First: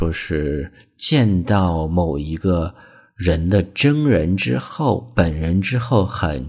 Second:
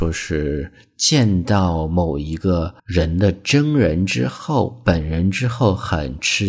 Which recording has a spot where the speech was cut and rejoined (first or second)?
second